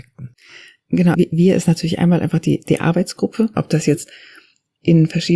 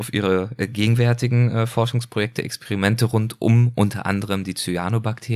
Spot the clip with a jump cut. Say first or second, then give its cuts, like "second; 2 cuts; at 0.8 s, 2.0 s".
first; 2 cuts; at 1.1 s, 3.5 s